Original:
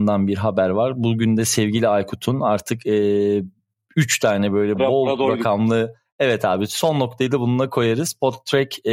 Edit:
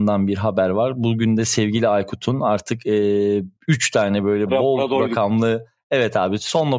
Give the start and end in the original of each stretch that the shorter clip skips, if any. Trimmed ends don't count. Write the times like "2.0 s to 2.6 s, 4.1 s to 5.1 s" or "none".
3.6 s to 3.8 s